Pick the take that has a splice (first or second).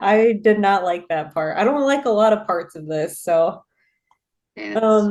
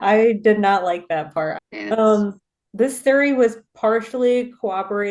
second